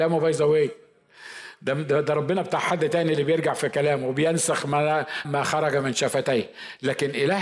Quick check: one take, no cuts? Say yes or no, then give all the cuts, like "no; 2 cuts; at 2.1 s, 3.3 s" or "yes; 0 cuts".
no; 1 cut; at 5.2 s